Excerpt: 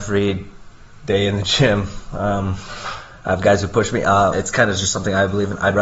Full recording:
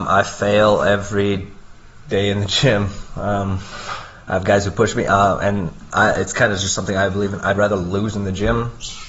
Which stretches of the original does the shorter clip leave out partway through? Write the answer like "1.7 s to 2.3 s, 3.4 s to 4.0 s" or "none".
5.4 s to 6.2 s